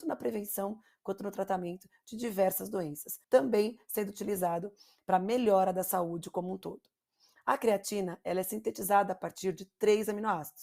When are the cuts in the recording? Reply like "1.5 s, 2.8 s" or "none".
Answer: 3.2 s